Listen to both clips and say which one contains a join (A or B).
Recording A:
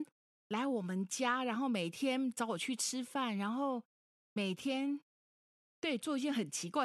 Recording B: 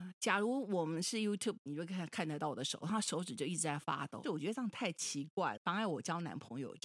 B